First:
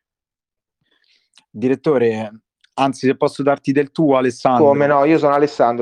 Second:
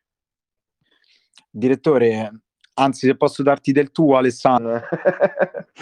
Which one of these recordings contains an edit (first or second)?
second